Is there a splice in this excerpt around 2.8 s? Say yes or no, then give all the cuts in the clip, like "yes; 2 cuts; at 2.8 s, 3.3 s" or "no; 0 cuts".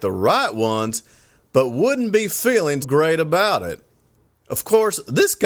yes; 1 cut; at 2.8 s